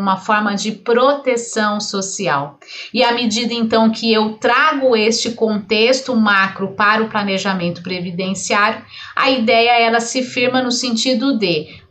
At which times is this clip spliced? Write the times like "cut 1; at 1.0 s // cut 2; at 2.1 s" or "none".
none